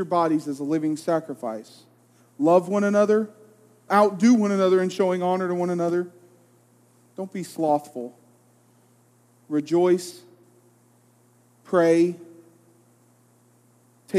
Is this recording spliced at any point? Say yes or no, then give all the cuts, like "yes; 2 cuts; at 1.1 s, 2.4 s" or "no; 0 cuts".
yes; 1 cut; at 3.9 s